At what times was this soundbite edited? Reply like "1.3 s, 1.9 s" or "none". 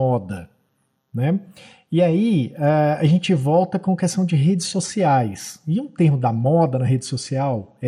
none